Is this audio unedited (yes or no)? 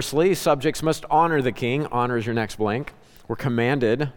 yes